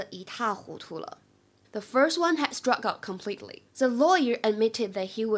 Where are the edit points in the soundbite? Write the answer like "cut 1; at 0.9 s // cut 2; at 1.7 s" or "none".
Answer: cut 1; at 1.6 s // cut 2; at 3.7 s